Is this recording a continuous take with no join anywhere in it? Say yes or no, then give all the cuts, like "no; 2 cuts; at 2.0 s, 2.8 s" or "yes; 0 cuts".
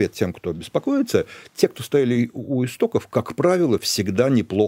yes; 0 cuts